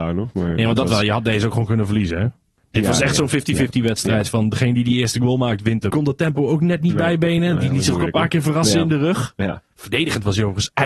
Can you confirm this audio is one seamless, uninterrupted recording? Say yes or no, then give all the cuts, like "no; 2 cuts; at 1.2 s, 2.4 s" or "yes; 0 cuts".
no; 1 cut; at 5.9 s